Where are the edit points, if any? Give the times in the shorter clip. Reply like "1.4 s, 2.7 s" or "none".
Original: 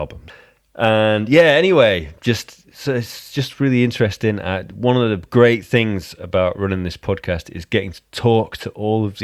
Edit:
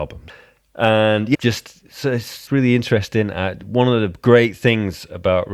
1.3 s, 2.5 s